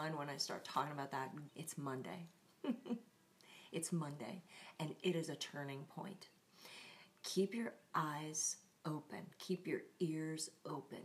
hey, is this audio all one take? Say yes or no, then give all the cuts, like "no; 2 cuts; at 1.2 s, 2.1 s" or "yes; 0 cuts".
no; 1 cut; at 1.5 s